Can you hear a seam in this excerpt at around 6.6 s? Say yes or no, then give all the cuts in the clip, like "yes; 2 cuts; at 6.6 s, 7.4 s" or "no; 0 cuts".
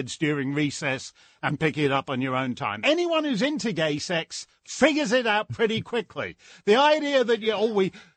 no; 1 cut; at 2.8 s